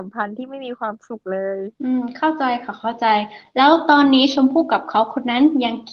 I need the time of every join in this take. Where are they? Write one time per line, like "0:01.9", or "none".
0:01.7